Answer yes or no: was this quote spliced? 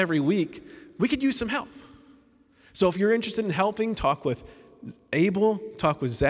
no